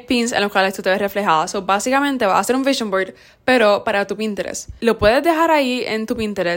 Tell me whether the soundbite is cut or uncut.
uncut